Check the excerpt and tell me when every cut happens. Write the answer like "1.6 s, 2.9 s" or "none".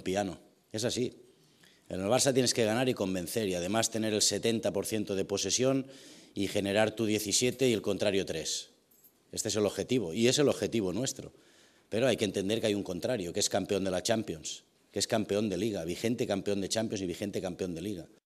none